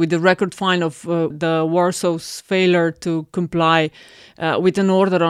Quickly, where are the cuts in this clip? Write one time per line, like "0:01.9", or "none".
0:01.3